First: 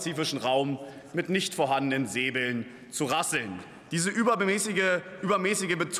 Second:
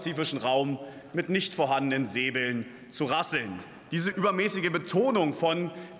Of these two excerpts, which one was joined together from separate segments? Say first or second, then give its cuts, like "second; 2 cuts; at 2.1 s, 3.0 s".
second; 1 cut; at 4.1 s